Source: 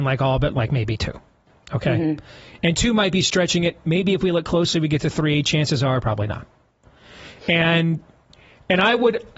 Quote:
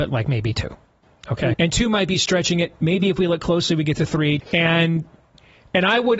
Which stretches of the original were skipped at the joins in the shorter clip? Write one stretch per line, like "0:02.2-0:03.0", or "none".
0:02.0-0:02.6
0:05.4-0:07.4